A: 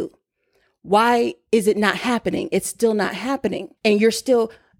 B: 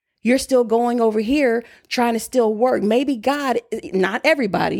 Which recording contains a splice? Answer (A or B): A